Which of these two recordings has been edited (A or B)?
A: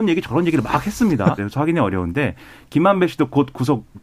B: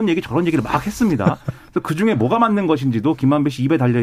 A